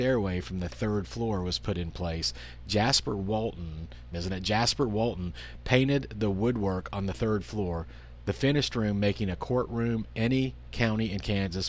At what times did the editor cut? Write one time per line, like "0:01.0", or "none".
0:04.1